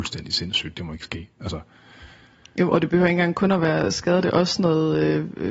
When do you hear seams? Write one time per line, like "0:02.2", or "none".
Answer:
none